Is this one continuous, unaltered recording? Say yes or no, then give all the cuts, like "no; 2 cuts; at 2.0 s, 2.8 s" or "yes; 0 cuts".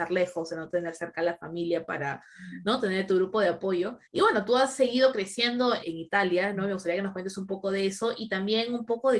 no; 2 cuts; at 4.1 s, 5.8 s